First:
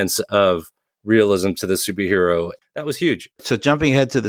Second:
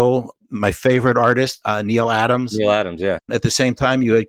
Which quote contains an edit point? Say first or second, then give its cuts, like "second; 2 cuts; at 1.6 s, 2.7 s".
second; 1 cut; at 3.2 s